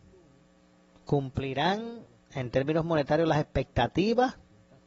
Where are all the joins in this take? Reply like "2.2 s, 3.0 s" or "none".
none